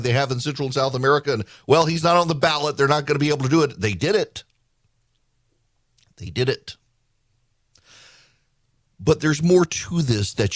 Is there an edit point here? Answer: no; 0 cuts

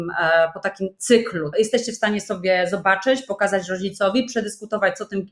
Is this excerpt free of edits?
no; 1 cut; at 1.5 s

